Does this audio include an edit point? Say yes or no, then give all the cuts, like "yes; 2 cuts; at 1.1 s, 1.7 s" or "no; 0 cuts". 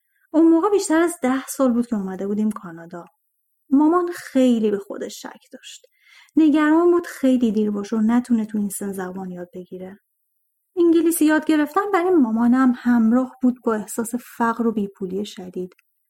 yes; 1 cut; at 10.6 s